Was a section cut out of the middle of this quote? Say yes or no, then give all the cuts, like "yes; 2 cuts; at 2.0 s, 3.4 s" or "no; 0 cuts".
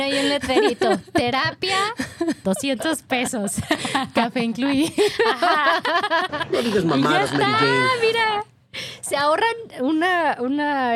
yes; 1 cut; at 2.4 s